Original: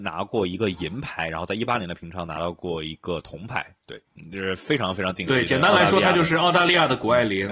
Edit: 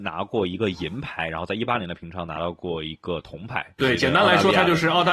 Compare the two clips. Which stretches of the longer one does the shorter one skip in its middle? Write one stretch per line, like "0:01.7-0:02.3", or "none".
0:03.8-0:05.3